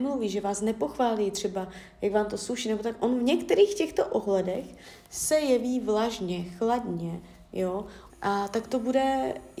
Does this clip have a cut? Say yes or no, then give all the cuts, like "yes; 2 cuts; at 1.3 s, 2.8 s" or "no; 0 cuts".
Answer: yes; 1 cut; at 8.1 s